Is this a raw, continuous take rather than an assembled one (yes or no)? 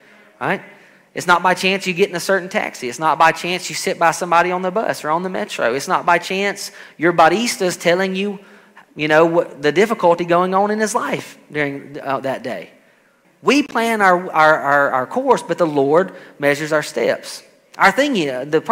no